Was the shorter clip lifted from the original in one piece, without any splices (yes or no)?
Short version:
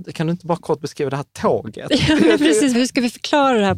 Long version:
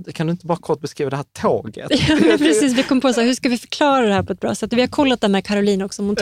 no